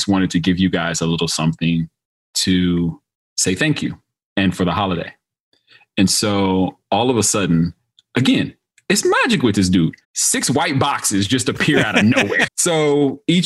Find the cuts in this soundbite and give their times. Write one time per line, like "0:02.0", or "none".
0:10.0
0:12.5